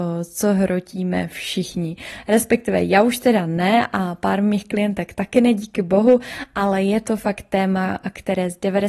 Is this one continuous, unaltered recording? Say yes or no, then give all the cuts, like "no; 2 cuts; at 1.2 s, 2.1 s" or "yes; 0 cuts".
yes; 0 cuts